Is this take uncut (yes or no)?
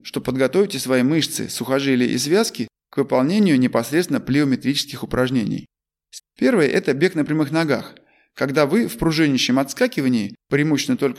no